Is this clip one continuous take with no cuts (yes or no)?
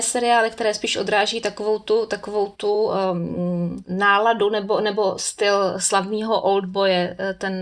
yes